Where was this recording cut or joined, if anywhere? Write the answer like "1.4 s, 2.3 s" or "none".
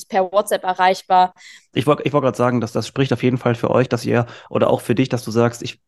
1.7 s

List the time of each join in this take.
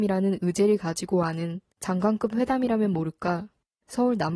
1.7 s

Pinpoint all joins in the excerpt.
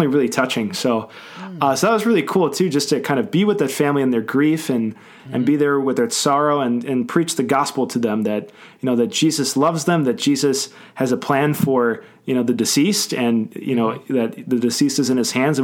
none

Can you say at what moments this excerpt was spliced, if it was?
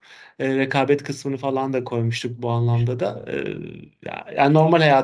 none

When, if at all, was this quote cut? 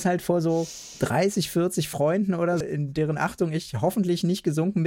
2.6 s

